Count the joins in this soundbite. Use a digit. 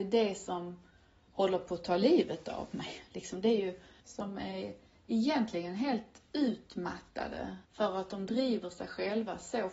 2